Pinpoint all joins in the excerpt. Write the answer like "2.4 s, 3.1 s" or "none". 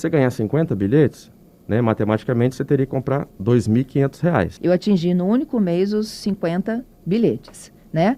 4.6 s